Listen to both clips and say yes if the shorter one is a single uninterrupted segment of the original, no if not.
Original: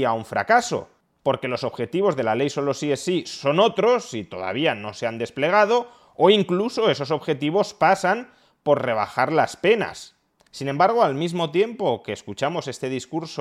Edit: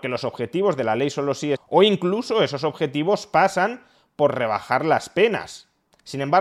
no